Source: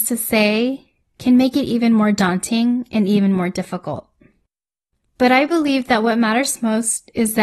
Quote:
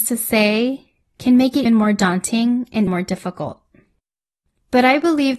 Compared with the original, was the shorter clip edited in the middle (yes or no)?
yes